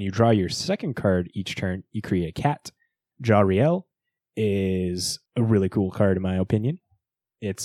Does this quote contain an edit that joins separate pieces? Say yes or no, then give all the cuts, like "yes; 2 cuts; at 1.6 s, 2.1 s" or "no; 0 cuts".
yes; 2 cuts; at 3.1 s, 5.3 s